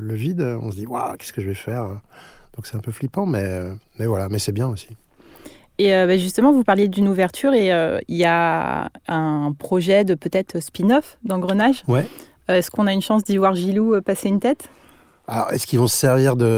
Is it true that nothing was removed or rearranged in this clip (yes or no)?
yes